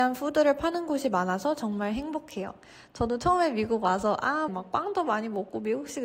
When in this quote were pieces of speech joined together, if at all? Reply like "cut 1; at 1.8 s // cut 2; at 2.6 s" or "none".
cut 1; at 4.5 s